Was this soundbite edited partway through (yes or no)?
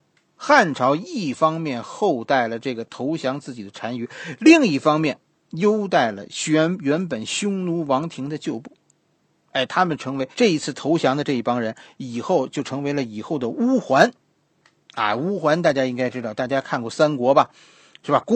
yes